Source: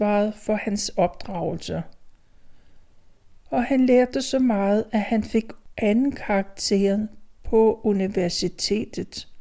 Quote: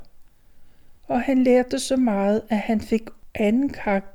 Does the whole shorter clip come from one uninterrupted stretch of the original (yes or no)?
no